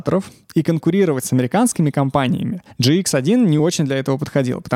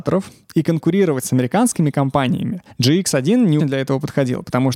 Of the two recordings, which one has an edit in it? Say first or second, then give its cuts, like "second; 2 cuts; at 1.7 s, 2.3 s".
second; 1 cut; at 3.6 s